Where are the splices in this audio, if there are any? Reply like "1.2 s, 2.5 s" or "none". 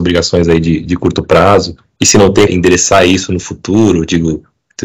2.5 s

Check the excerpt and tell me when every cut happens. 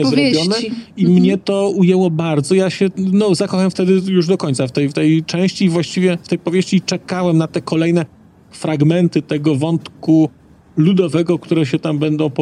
none

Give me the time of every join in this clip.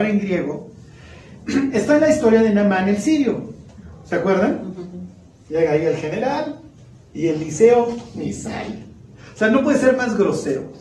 none

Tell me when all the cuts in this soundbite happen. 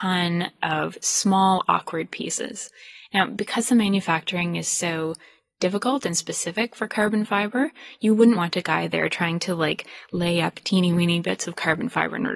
8.3 s

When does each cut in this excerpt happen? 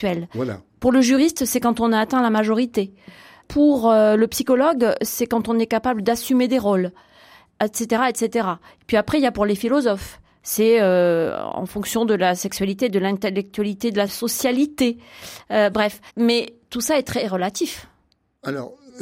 12.9 s, 16.1 s

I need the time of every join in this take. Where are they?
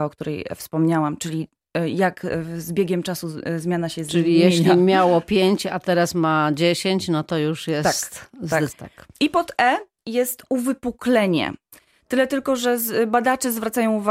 8.7 s

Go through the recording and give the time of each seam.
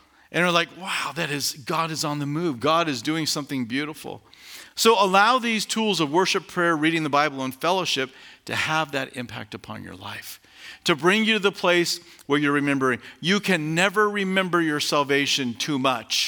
none

